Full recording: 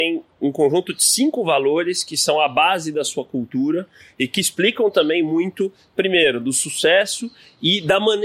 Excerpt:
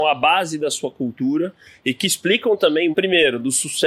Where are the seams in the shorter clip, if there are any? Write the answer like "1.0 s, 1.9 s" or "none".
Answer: 2.9 s

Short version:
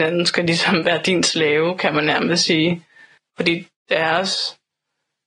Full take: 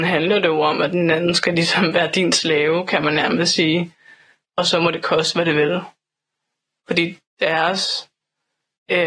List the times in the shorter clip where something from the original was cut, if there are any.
3.2 s

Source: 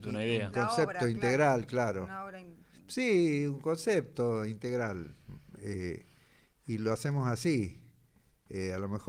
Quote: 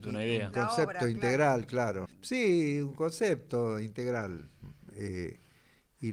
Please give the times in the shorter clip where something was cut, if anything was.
2.1 s

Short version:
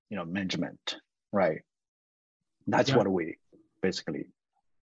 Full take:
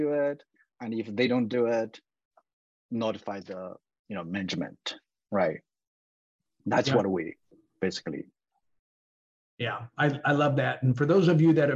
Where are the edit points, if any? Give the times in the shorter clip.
none

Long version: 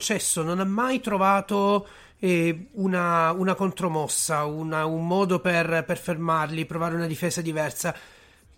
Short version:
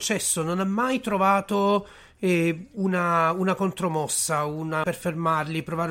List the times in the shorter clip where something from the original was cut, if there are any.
4.8 s

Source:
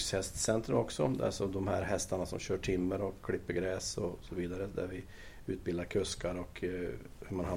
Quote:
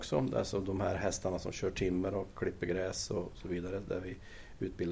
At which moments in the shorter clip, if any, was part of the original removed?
none

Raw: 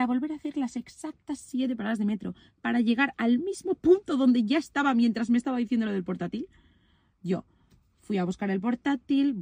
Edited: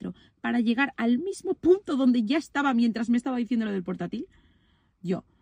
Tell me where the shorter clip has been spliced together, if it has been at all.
none

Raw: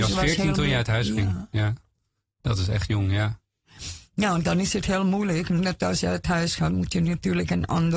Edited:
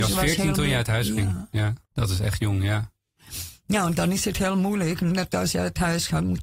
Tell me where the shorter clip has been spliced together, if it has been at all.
1.8 s

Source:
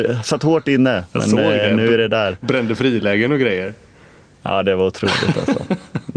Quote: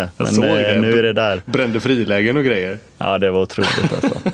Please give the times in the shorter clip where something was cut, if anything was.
2.9 s

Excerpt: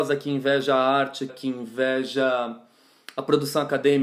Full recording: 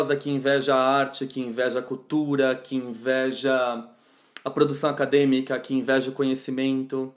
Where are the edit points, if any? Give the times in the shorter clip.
1.3 s

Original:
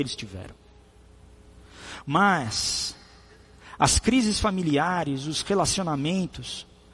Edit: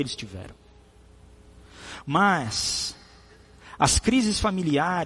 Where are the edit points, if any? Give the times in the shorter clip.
none

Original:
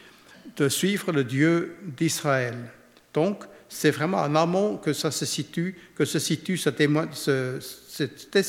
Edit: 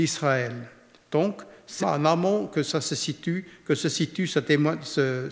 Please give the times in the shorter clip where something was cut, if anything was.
1.8 s

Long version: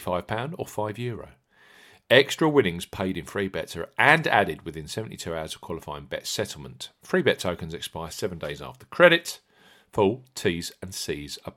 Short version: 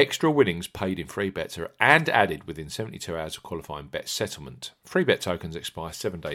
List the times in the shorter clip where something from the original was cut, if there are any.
none

